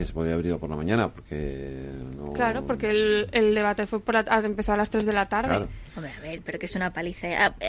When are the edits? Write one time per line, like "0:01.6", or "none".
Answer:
none